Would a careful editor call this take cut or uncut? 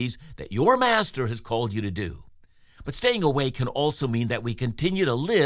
uncut